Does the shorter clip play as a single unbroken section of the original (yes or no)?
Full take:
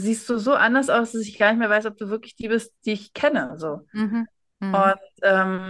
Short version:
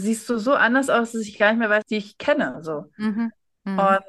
no